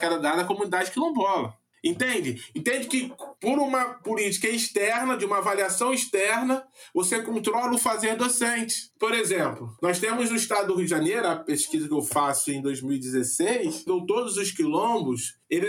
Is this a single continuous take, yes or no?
no